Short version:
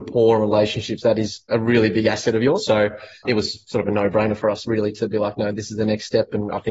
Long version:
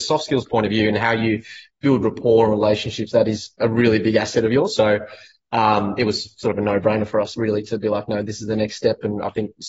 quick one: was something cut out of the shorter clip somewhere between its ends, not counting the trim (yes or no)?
yes